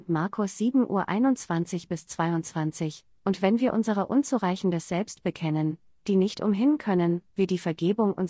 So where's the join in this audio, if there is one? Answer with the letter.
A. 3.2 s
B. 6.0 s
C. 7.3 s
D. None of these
C